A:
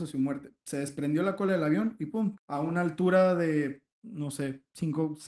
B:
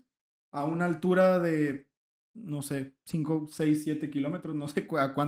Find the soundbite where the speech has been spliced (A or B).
A